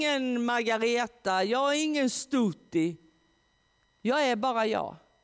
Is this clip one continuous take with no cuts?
yes; 0 cuts

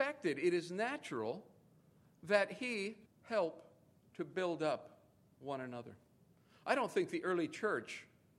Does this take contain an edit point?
yes; 1 cut; at 3.1 s

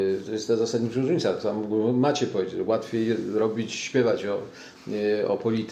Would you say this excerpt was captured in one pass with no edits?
yes; 0 cuts

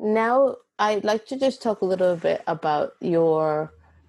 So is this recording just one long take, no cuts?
yes; 0 cuts

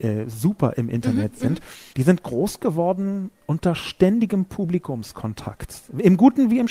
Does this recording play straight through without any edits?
no; 1 cut; at 1.9 s

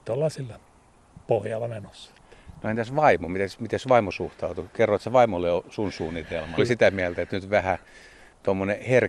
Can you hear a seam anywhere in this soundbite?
yes; 1 cut; at 6.6 s

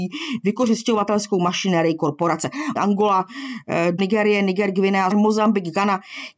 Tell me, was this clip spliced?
yes; 3 cuts; at 2.8 s, 4.0 s, 5.1 s

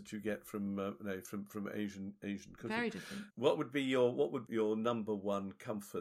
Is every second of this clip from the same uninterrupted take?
no; 2 cuts; at 3.3 s, 4.5 s

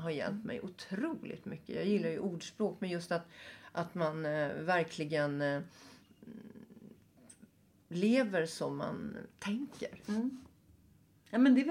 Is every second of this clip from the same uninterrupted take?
yes; 0 cuts

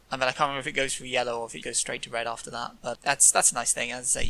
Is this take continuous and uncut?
no; 2 cuts; at 1.6 s, 2.9 s

